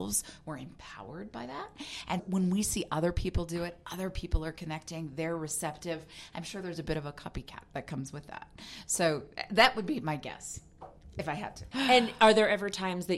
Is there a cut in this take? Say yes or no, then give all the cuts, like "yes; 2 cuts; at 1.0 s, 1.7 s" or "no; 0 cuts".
yes; 2 cuts; at 2.2 s, 11.7 s